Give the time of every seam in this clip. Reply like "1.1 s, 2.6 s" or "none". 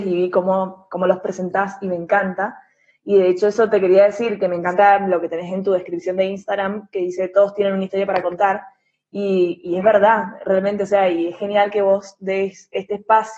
none